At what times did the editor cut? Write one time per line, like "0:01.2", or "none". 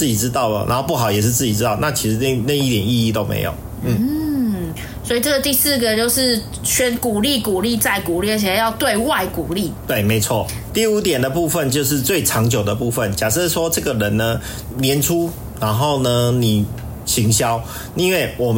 0:10.7
0:17.0